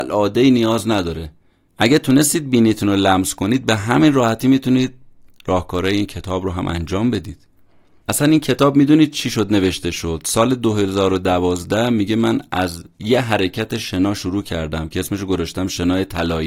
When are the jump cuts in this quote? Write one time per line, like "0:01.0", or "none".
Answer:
none